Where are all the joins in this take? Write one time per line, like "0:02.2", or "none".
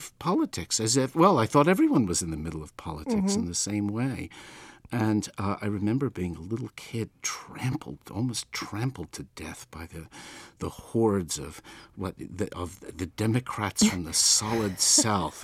none

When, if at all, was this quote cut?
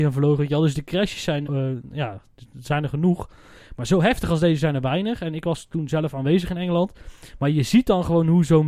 0:01.4

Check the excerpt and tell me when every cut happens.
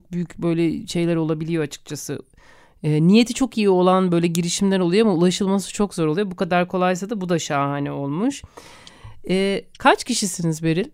none

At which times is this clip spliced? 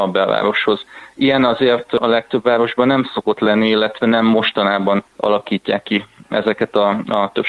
0:05.1

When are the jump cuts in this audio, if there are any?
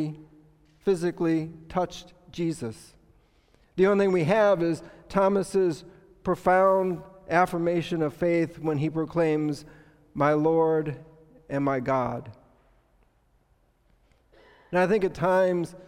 none

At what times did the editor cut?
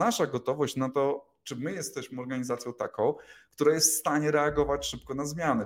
none

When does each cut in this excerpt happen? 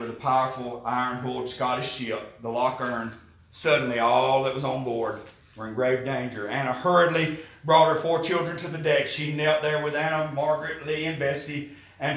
none

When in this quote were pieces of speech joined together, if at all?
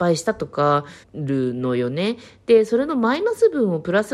0:01.0

